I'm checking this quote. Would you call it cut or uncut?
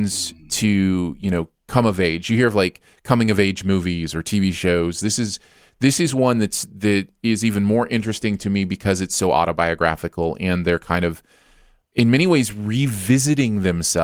uncut